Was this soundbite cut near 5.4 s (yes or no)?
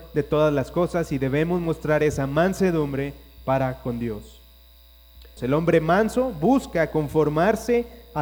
yes